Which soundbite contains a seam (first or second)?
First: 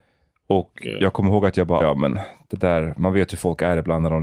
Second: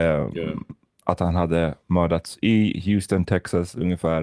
first